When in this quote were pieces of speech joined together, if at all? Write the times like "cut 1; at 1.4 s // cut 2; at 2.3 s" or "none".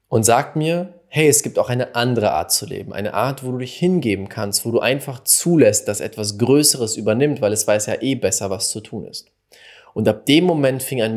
none